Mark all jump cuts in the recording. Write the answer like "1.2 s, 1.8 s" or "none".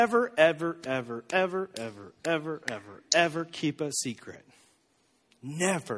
none